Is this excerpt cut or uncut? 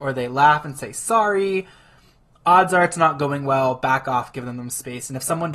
uncut